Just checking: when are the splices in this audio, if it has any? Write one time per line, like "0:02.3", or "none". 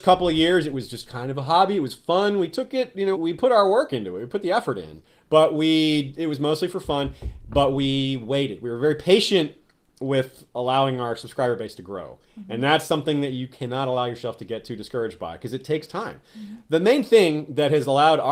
0:03.1

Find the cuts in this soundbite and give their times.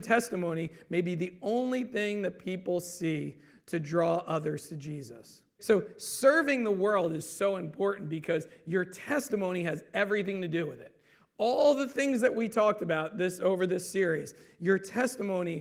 0:05.6

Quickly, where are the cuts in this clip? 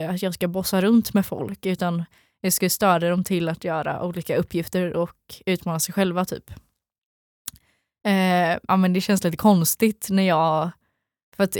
0:08.7

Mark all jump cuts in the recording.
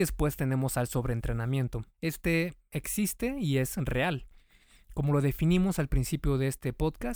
0:01.9

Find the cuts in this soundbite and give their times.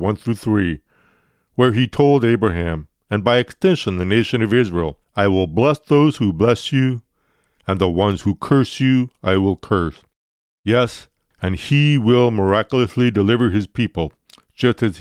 0:11.3

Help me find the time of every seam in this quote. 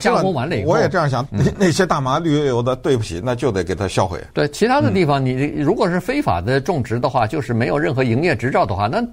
0:01.3
0:04.3

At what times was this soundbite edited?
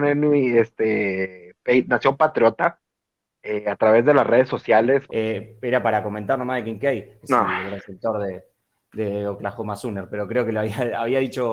0:05.1
0:07.2

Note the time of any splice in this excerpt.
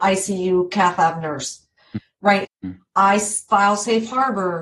0:02.4

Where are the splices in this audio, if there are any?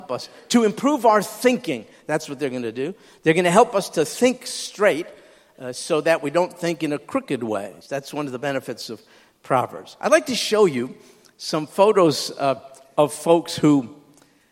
0:07.8

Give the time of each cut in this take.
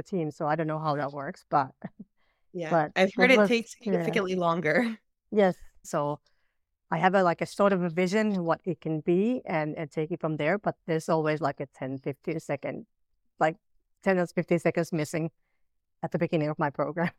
0:05.8

